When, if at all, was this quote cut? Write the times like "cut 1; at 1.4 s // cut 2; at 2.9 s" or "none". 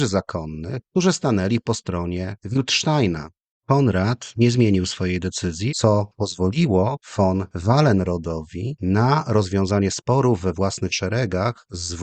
cut 1; at 5.7 s